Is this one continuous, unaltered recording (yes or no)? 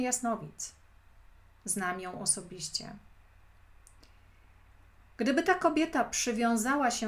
yes